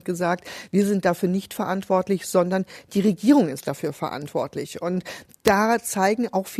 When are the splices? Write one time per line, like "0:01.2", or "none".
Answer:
none